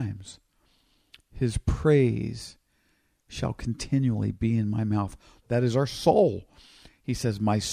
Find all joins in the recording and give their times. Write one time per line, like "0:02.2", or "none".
0:05.4